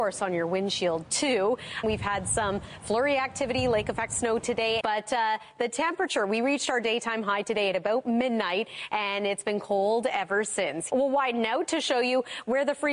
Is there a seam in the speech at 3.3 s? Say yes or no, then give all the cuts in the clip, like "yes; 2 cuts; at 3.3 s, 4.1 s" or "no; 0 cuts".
no; 3 cuts; at 1.8 s, 4.8 s, 10.9 s